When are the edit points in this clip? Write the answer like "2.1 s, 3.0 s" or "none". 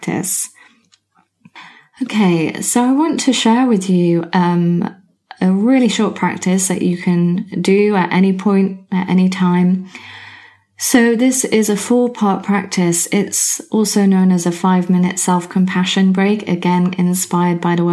none